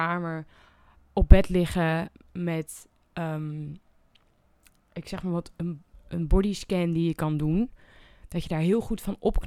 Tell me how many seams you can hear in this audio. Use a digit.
0